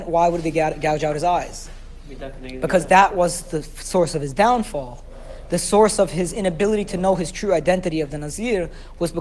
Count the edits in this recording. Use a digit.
0